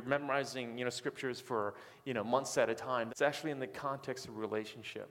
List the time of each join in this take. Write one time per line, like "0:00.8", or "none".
0:03.1